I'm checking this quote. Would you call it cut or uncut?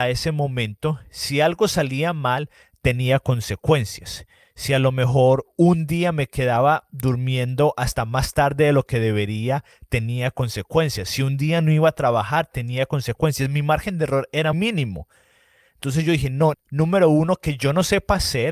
cut